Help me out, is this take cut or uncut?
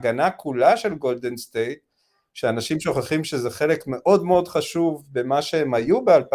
uncut